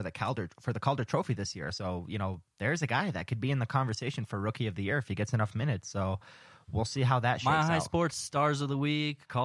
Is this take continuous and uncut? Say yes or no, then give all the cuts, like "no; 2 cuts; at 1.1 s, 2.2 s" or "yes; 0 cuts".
yes; 0 cuts